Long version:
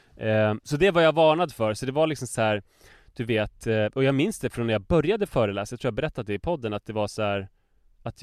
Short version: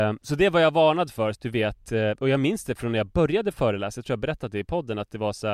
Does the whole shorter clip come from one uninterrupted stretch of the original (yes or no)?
no